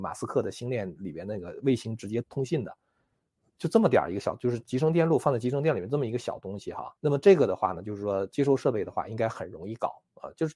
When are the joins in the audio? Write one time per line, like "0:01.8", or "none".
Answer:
0:02.2
0:07.0